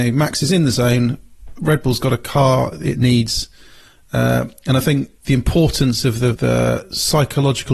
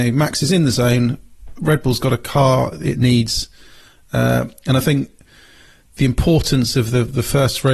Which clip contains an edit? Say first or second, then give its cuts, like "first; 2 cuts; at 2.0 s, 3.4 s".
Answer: first; 2 cuts; at 5.2 s, 6.3 s